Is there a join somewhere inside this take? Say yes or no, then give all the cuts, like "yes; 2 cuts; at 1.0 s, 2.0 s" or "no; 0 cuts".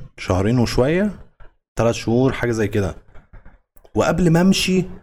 no; 0 cuts